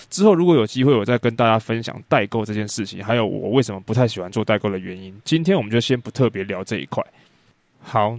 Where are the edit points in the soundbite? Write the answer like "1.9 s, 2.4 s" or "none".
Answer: none